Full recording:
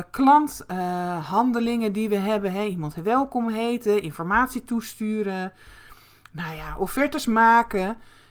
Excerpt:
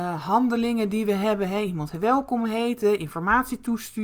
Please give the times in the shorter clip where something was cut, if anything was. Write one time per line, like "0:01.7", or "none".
none